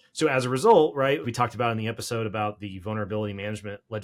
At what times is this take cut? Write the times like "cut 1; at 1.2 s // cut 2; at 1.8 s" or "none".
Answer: cut 1; at 1.2 s